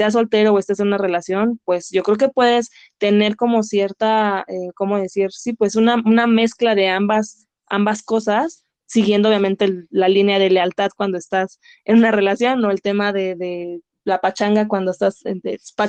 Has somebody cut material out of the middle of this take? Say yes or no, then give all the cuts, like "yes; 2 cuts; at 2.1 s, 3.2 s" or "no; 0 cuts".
no; 0 cuts